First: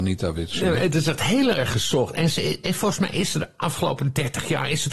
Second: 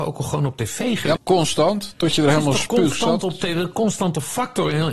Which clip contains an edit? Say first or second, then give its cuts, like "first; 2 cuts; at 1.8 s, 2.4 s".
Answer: second; 1 cut; at 1.2 s